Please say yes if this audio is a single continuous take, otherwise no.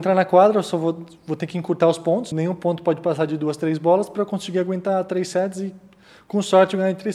no